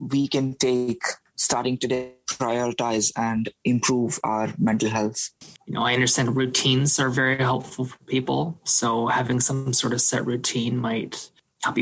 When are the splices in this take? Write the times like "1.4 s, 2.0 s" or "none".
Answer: 5.6 s

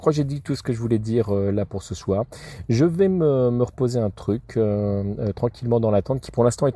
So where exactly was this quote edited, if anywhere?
none

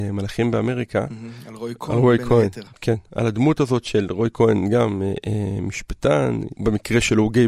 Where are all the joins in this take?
6.5 s

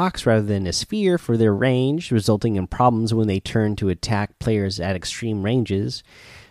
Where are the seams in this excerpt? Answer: none

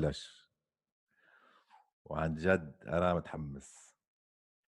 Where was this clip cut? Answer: none

